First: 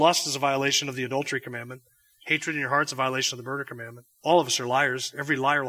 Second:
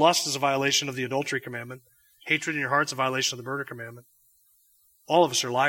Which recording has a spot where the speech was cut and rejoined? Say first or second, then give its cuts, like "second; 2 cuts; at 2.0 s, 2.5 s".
first; 1 cut; at 4.1 s